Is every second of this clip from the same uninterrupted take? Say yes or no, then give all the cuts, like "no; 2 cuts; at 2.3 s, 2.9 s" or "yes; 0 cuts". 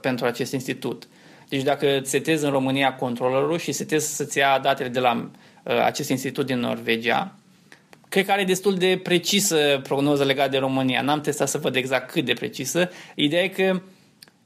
no; 1 cut; at 7.9 s